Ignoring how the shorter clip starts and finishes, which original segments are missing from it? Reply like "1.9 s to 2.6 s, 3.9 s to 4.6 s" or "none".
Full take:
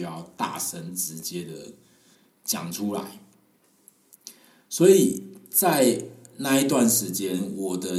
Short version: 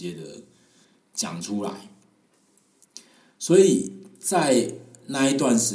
none